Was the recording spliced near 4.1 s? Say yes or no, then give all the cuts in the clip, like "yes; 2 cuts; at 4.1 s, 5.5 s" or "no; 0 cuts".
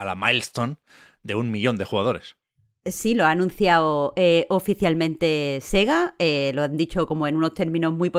no; 0 cuts